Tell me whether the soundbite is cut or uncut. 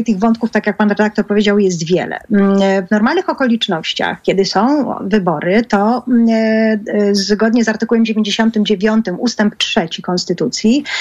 uncut